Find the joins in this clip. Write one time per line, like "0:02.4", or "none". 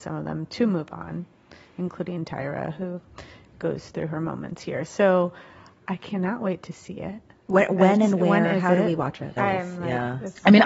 0:09.4